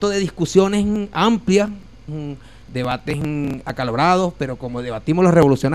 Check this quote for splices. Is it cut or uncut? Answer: cut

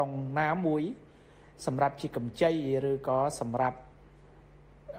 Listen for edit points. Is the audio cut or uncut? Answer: uncut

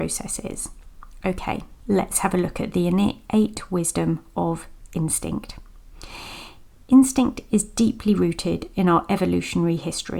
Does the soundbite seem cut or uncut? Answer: cut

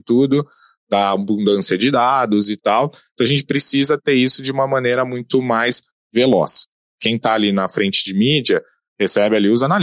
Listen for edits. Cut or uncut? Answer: cut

